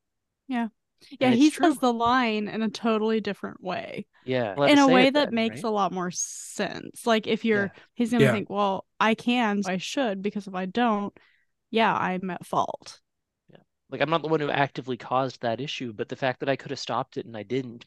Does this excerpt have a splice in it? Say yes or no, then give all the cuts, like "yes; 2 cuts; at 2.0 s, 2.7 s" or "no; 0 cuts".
yes; 3 cuts; at 4.6 s, 7.9 s, 9.6 s